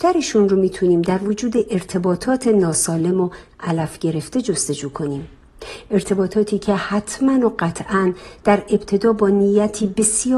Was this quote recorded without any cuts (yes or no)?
yes